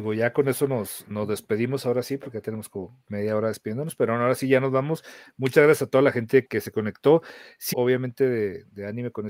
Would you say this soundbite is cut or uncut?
cut